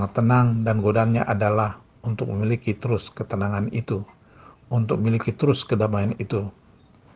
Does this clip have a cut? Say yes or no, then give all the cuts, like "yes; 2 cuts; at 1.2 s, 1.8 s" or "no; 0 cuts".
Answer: no; 0 cuts